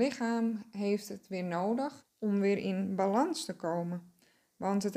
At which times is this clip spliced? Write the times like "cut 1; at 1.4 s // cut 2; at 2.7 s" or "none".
cut 1; at 2.0 s

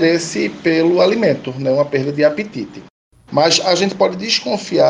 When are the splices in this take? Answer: cut 1; at 3.3 s

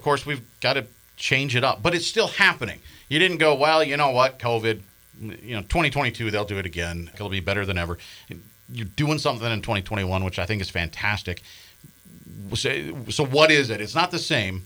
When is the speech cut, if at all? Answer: cut 1; at 7.1 s

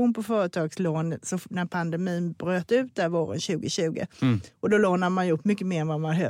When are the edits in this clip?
none

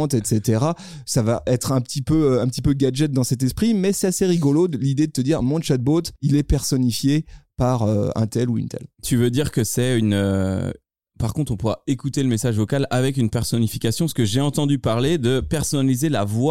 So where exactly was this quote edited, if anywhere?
cut 1; at 6.2 s

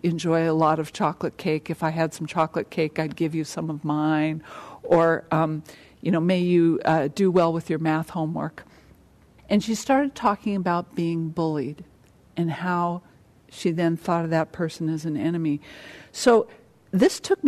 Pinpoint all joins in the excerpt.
cut 1; at 9.4 s

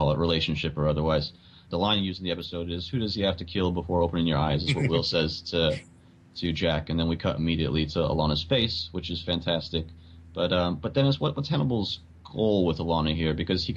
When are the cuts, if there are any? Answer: none

